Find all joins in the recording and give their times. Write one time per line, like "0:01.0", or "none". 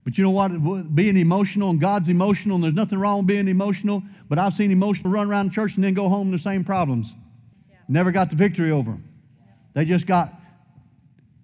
0:05.0
0:07.5

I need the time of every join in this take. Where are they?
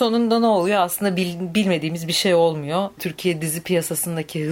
0:03.0

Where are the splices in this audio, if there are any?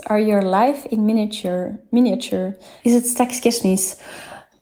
0:02.8

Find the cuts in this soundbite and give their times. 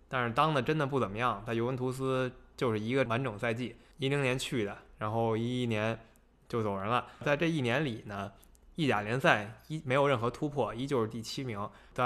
none

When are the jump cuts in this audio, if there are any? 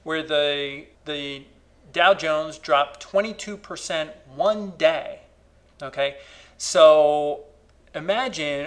0:00.9

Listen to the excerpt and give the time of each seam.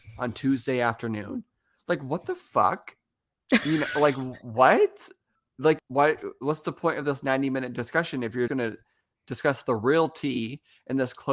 0:05.8
0:08.5

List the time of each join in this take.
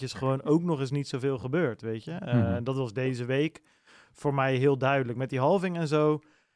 none

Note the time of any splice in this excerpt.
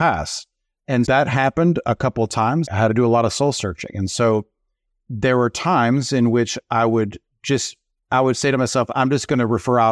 0:01.1
0:02.7

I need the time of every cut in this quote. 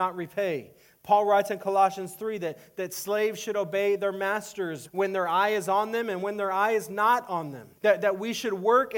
0:04.8
0:07.8

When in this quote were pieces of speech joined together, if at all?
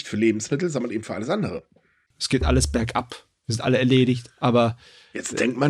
0:02.1

